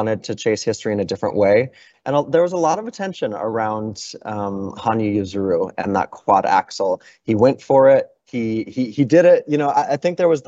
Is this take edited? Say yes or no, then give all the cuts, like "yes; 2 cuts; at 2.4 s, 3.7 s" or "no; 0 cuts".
yes; 1 cut; at 1.9 s